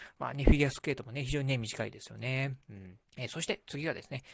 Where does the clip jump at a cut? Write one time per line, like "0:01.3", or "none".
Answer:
0:03.1